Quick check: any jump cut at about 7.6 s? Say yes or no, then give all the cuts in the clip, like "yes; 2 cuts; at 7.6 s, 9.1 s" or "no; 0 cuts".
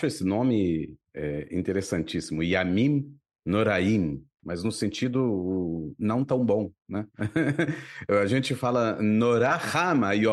no; 2 cuts; at 1.1 s, 4.4 s